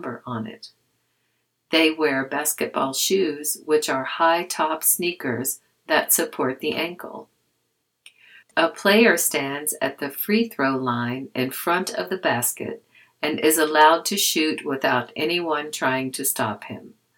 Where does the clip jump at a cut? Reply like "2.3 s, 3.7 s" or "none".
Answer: 8.4 s